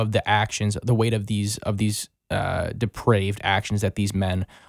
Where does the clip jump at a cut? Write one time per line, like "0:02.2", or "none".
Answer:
none